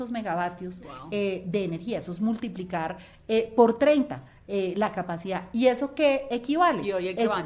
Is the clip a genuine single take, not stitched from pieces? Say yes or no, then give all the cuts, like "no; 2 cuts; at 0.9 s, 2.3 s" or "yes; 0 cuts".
yes; 0 cuts